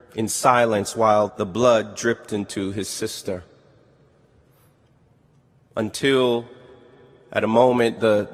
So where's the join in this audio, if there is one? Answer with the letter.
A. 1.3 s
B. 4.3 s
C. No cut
A